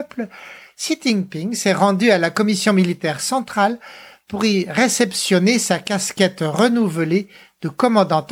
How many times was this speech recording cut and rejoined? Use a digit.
0